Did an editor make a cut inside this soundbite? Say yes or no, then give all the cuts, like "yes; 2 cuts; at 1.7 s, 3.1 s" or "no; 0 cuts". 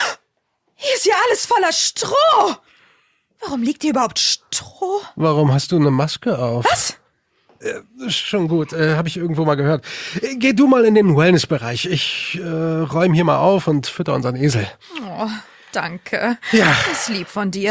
no; 0 cuts